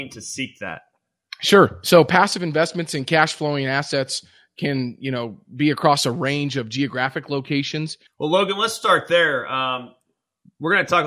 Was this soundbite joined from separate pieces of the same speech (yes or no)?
yes